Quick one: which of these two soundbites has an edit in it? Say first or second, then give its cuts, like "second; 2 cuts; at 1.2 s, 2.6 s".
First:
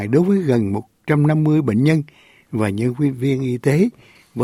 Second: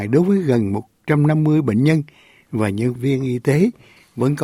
second; 1 cut; at 3.0 s